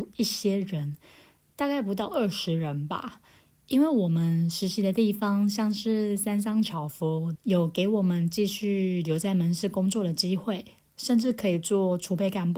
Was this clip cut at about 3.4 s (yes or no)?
no